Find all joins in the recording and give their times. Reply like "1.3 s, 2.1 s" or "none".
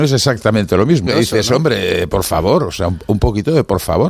1.1 s